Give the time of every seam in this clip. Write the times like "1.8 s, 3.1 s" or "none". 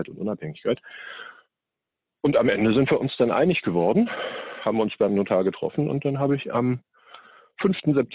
none